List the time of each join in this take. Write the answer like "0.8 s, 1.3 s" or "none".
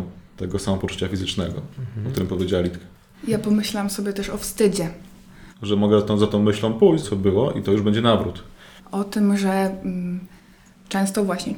5.5 s, 7.0 s, 8.8 s